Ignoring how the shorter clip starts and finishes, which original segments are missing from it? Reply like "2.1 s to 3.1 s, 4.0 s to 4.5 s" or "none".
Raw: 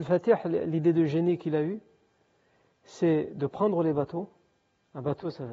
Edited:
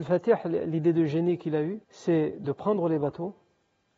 1.8 s to 2.8 s